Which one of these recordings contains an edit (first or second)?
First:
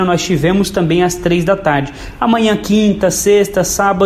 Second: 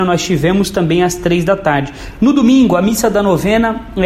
second